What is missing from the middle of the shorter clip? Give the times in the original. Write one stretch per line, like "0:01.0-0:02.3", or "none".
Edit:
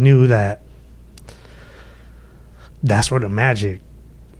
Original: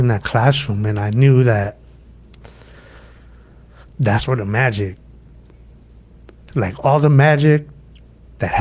none